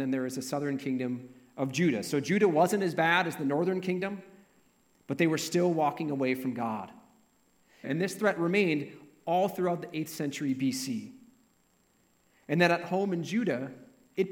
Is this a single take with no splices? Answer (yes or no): no